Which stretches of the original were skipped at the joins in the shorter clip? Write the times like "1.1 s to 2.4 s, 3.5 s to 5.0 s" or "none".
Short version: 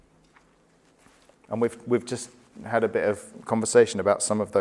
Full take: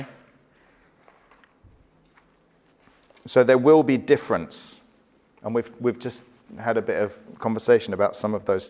3.1 s to 5.3 s